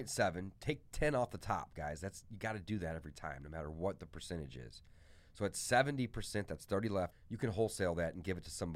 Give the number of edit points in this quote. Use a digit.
1